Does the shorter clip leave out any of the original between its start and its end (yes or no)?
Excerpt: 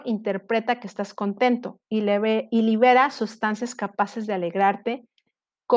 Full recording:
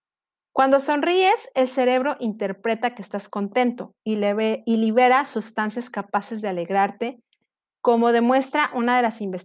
no